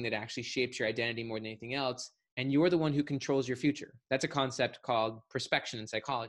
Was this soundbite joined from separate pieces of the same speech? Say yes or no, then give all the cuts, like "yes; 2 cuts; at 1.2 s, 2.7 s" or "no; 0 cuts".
no; 0 cuts